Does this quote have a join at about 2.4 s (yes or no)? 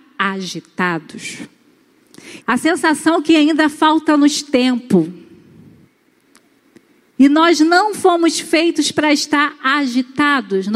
yes